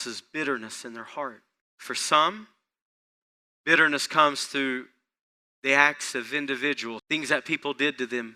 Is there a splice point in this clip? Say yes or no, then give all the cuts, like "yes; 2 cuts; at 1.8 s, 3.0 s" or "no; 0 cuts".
yes; 2 cuts; at 1.6 s, 7.0 s